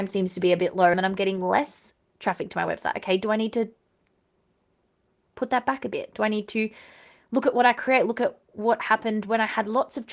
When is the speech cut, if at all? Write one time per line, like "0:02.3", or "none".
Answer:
0:00.9

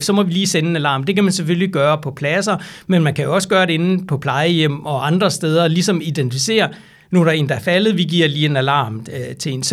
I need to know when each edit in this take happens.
none

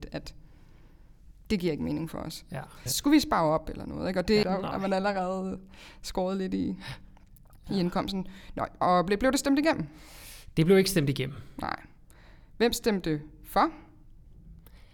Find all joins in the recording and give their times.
0:02.9
0:04.4
0:08.8

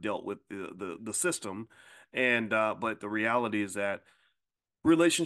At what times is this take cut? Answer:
0:01.0

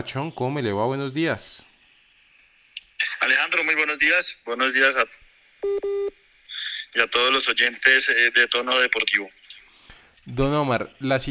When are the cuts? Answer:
none

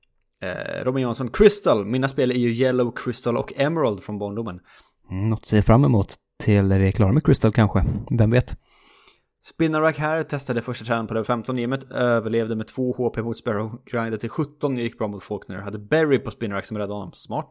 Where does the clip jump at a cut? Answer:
none

